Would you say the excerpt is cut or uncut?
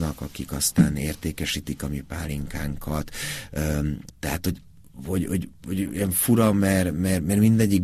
cut